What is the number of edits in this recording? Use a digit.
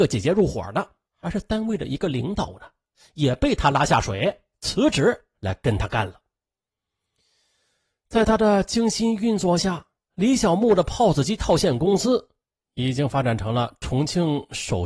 1